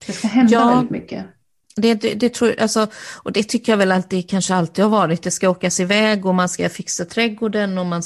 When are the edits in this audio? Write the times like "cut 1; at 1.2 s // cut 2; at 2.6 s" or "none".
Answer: cut 1; at 1.6 s

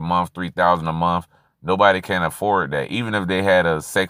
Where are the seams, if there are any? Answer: none

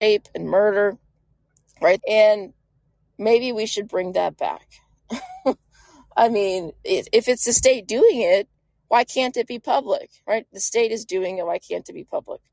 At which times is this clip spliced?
cut 1; at 2.0 s

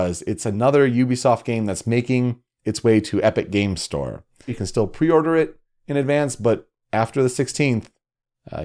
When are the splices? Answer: cut 1; at 4.5 s

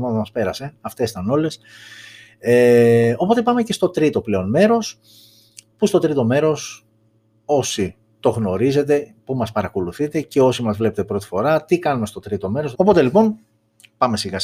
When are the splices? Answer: cut 1; at 12.7 s

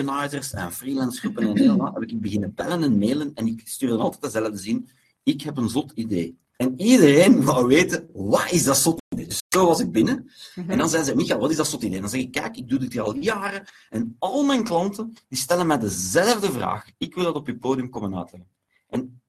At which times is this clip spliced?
cut 1; at 6.5 s

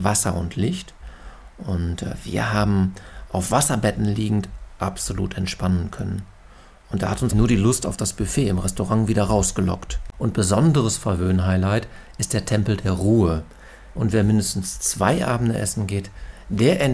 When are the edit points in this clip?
cut 1; at 7.3 s // cut 2; at 10.1 s // cut 3; at 13.9 s

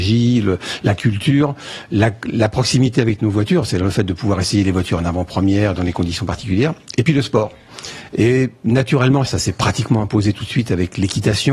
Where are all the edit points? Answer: cut 1; at 8.1 s // cut 2; at 9.3 s

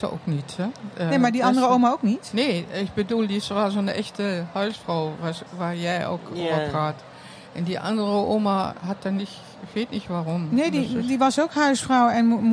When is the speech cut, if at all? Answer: none

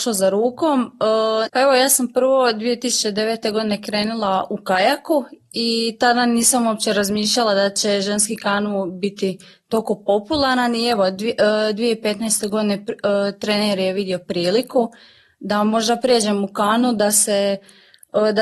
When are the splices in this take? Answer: cut 1; at 1.5 s

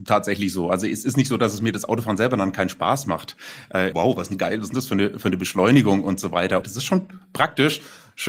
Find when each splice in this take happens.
cut 1; at 3.9 s // cut 2; at 6.6 s

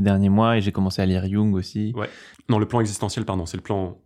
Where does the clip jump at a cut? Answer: cut 1; at 2.3 s

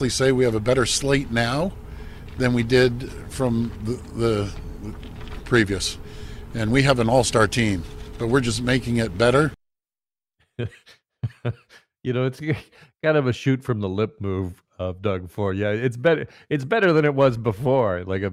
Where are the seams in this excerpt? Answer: none

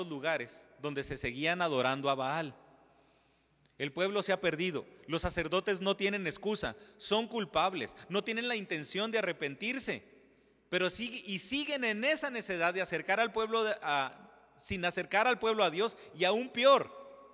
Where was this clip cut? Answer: none

